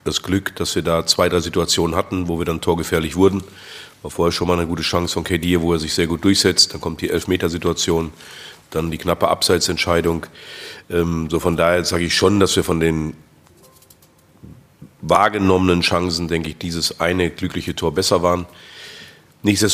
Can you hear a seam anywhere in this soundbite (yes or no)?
no